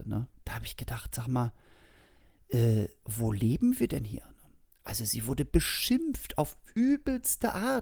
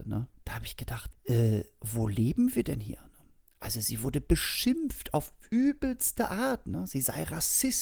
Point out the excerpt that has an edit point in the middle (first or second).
second